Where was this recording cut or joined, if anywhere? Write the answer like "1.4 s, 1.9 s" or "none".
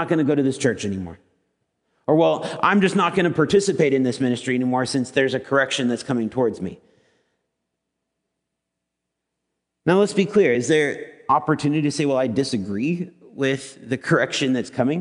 none